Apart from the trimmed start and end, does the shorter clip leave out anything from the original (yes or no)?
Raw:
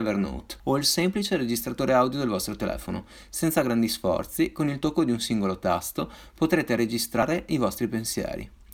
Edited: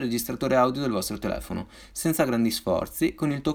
no